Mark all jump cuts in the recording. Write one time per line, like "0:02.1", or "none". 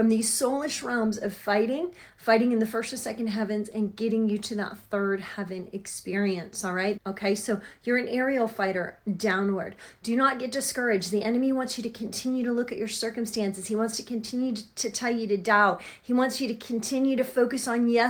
0:07.0